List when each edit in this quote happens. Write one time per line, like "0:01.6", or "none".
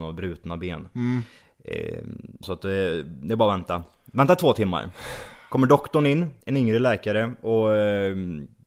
0:02.4